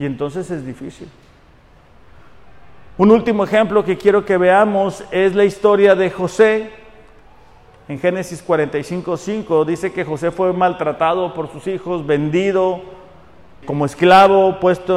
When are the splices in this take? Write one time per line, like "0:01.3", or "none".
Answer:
0:13.6